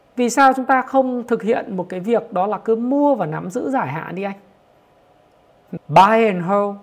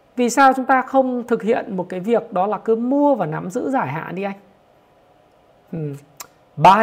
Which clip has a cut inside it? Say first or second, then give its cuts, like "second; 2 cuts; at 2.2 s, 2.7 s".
first; 1 cut; at 5.8 s